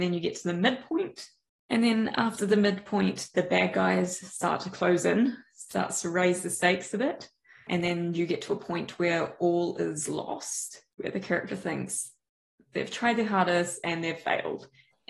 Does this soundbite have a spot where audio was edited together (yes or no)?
no